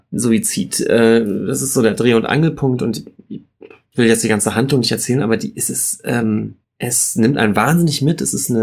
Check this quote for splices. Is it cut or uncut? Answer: cut